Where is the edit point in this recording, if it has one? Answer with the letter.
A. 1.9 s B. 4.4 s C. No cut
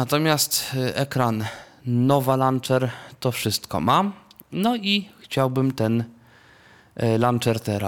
C